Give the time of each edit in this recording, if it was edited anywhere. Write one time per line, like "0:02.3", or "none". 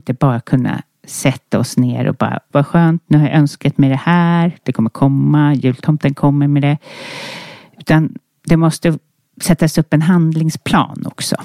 0:02.5